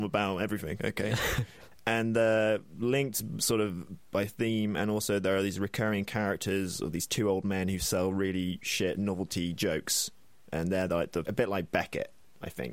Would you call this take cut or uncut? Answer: cut